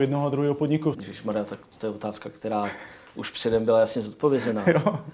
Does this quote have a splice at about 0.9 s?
yes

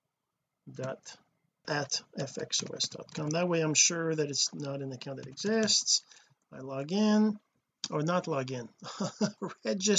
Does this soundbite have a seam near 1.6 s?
yes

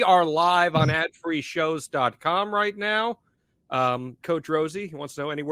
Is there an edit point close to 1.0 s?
no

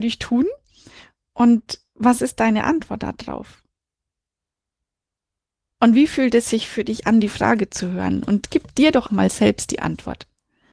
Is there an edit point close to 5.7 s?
no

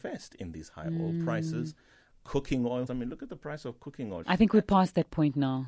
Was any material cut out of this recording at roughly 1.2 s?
no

